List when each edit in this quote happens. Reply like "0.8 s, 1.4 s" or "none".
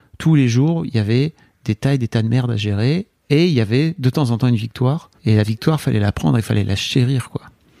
5.2 s